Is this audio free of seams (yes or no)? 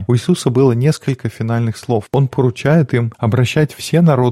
yes